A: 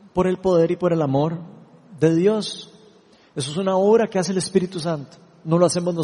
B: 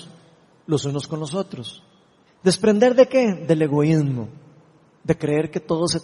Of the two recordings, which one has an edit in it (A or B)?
B